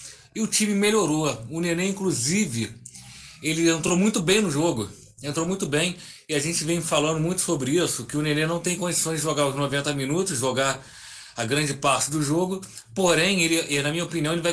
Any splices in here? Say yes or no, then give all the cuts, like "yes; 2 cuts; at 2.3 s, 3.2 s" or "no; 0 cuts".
no; 0 cuts